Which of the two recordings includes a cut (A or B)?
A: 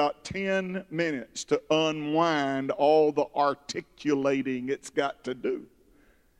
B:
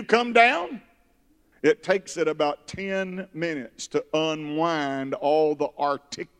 B